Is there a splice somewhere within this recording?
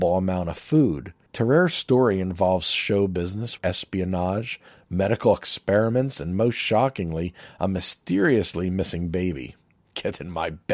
yes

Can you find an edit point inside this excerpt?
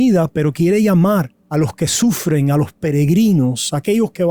yes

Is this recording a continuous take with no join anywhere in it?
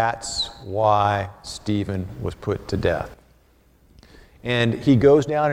yes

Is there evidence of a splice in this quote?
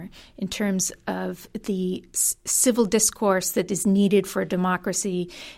no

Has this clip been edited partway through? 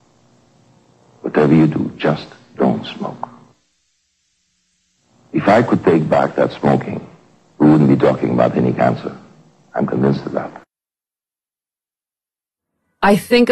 no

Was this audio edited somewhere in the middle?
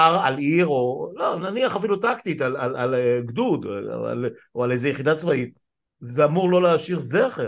no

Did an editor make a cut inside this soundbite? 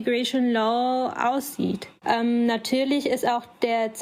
yes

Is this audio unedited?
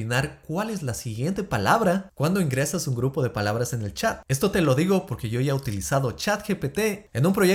no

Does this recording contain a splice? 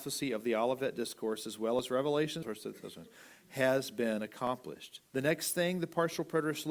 yes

